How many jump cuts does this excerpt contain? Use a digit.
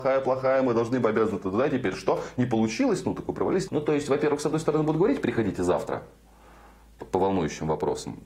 1